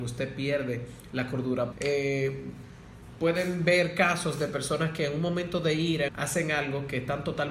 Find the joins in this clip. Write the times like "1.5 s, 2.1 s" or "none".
1.7 s, 6.1 s